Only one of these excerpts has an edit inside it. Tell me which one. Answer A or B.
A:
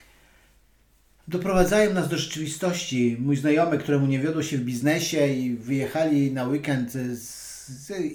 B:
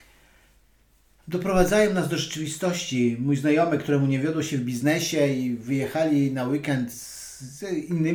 B